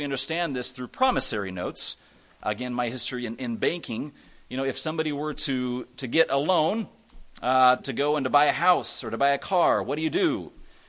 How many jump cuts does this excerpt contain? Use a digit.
1